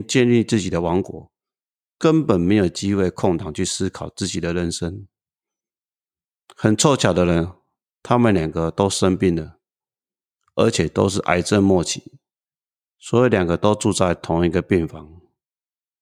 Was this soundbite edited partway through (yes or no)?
no